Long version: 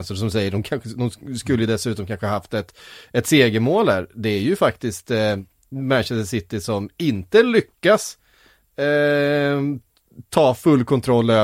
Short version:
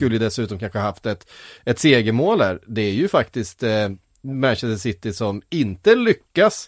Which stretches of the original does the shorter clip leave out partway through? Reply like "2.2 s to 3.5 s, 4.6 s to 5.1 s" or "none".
none